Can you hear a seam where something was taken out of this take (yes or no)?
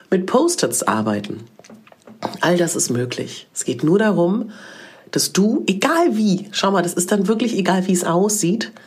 no